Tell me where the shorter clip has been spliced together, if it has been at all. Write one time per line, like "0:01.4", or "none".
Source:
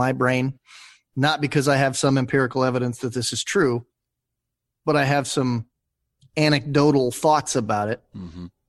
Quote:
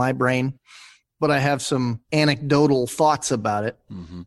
0:01.0
0:02.0